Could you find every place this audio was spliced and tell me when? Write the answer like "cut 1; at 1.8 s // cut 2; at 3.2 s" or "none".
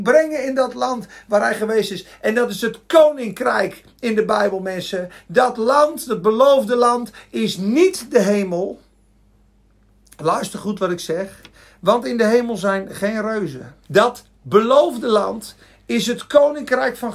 cut 1; at 13.8 s